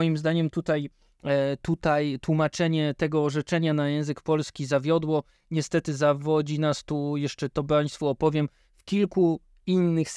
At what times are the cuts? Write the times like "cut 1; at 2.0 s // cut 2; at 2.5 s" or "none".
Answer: none